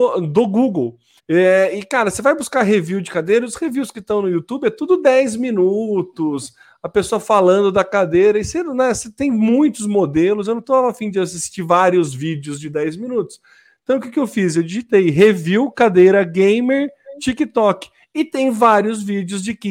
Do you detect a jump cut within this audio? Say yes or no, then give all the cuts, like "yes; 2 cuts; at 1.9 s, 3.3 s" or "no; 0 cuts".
yes; 1 cut; at 1.2 s